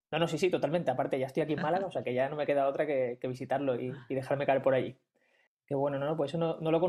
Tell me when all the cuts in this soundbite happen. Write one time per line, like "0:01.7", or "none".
0:05.5